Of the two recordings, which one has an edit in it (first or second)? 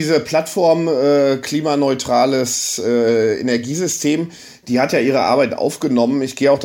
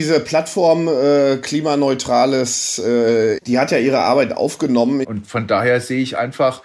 second